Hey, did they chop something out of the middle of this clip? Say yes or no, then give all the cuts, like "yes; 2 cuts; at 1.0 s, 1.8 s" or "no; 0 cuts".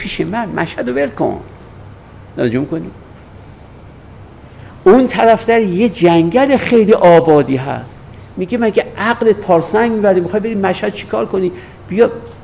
no; 0 cuts